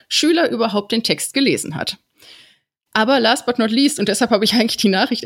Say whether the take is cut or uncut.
uncut